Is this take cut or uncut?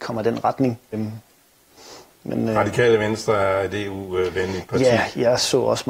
cut